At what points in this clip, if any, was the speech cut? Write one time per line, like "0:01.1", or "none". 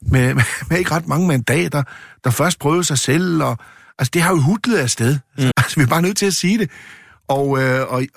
0:05.5